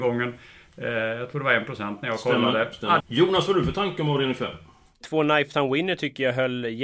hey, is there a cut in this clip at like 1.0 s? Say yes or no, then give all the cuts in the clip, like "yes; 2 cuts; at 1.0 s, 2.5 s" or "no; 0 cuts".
no; 2 cuts; at 3.0 s, 5.0 s